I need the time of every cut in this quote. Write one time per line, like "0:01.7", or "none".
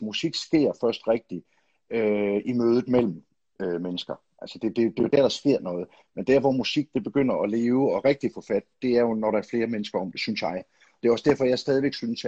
0:06.0